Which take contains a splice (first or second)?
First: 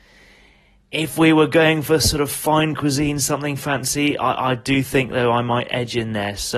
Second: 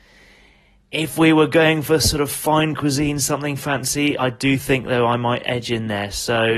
second